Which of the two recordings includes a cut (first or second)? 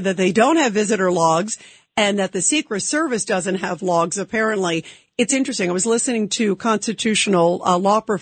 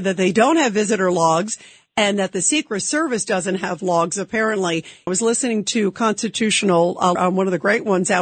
second